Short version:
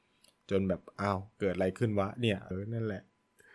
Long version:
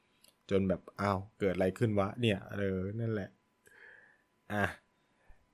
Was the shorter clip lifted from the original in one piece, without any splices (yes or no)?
no